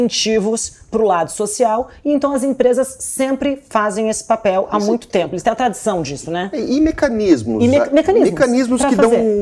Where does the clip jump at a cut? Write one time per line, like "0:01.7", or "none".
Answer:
none